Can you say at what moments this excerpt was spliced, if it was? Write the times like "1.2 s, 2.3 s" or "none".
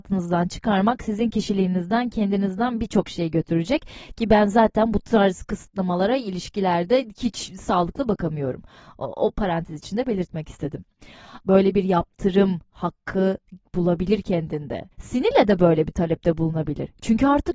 11.4 s, 14.9 s